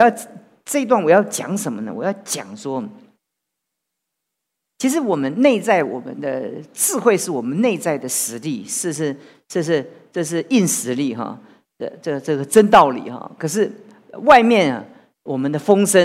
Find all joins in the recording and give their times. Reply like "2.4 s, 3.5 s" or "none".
none